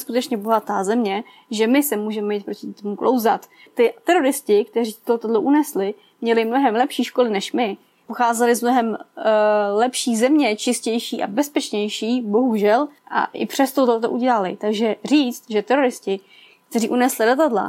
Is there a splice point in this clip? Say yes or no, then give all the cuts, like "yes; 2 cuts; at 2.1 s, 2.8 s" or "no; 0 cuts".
no; 0 cuts